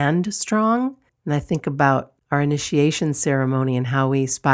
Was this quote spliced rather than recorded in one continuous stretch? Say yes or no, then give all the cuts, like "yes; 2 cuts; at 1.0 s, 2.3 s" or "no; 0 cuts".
yes; 2 cuts; at 1.1 s, 2.2 s